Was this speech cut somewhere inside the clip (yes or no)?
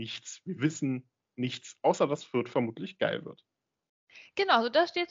no